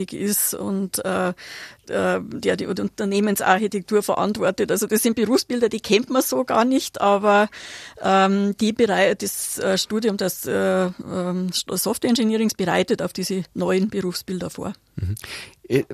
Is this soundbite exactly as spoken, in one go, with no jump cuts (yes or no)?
yes